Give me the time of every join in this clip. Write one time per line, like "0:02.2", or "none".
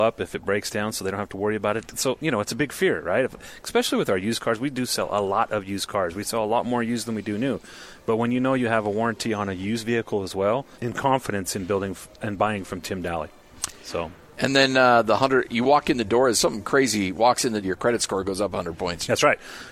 0:10.7
0:17.6